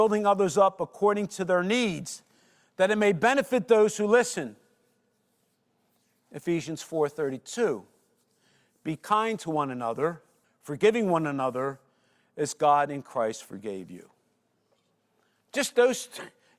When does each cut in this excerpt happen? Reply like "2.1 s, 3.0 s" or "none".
10.4 s